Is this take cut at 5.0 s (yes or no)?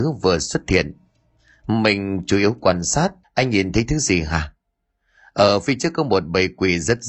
no